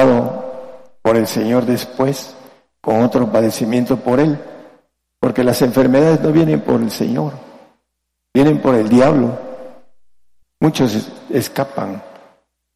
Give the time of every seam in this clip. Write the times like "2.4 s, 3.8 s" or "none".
10.4 s